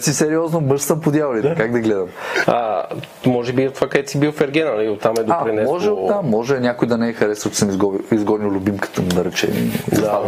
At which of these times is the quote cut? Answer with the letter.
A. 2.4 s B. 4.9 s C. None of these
A